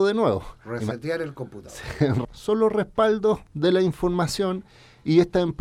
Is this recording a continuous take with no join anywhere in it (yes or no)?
no